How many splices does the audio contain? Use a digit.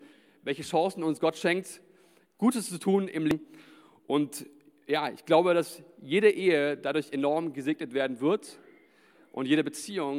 0